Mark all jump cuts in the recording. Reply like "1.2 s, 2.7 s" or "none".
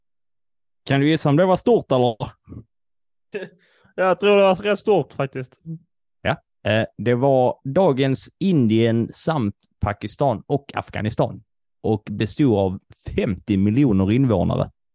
none